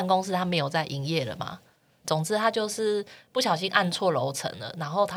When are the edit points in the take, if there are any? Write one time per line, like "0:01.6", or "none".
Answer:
0:02.0